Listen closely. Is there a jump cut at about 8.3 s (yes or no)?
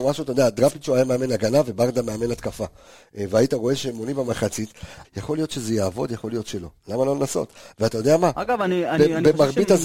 no